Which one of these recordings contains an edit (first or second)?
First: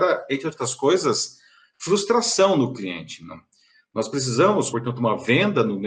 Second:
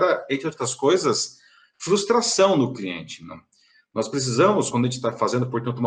first